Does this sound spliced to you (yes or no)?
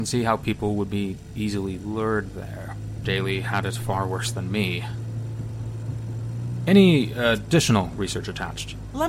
yes